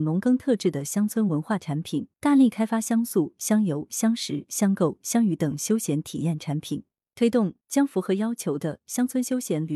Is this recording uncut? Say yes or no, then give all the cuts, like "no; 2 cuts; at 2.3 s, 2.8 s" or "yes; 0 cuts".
no; 1 cut; at 2.1 s